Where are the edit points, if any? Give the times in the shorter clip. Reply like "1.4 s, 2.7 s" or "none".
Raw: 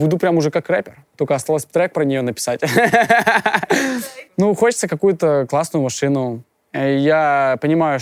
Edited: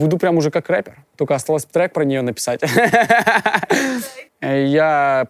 4.3 s